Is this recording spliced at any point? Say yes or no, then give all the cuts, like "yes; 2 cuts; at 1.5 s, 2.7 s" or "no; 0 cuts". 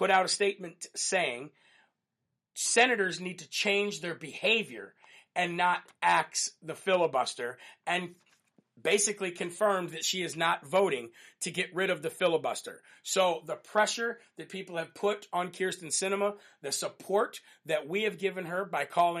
no; 0 cuts